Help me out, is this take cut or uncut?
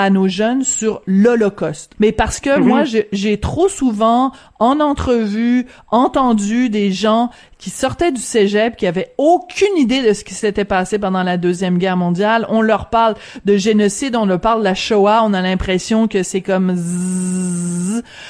cut